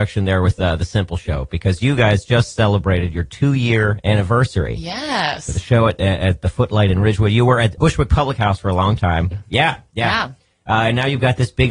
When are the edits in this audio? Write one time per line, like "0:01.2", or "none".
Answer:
0:07.8
0:09.3